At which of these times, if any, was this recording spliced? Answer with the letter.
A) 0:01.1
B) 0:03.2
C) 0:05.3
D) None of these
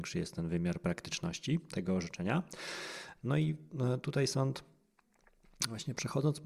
B